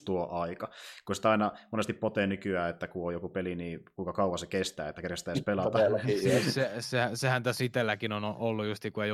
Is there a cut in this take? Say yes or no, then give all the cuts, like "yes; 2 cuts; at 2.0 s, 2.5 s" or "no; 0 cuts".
no; 0 cuts